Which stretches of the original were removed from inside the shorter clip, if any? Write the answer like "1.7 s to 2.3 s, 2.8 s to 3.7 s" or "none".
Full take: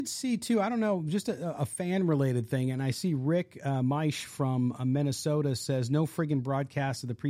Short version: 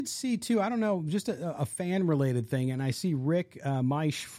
none